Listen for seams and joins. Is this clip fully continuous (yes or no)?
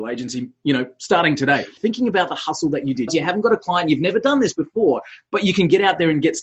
no